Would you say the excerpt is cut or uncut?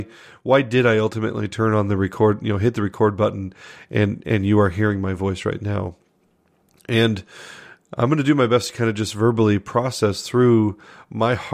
uncut